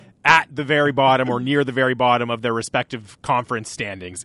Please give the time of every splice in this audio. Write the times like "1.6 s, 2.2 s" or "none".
none